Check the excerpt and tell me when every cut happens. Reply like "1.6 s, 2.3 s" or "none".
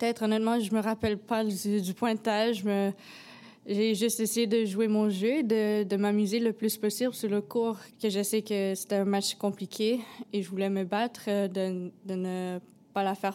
none